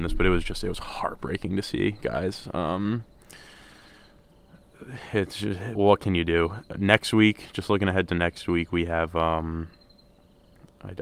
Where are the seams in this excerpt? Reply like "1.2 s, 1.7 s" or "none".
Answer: 5.7 s